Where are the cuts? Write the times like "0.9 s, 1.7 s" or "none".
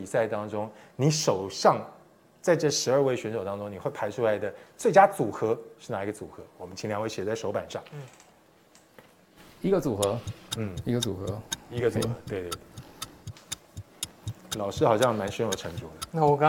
none